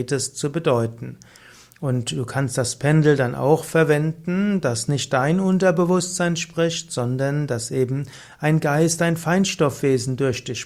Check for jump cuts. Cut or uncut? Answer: uncut